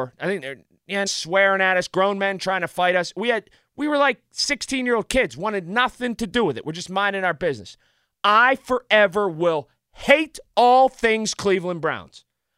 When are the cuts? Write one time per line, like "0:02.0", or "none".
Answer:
0:01.1